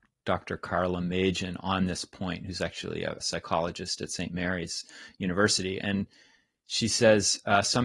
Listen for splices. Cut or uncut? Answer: cut